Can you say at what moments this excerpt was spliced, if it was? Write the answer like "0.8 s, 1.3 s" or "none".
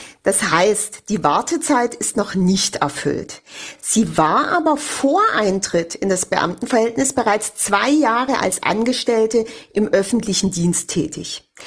none